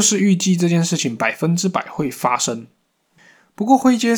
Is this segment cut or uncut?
uncut